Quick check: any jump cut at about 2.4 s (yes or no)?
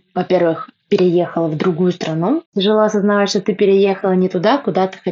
yes